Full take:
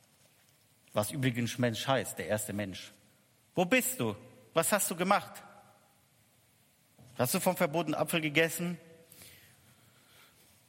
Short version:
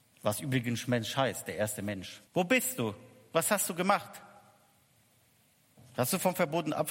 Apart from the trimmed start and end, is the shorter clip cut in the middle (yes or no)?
yes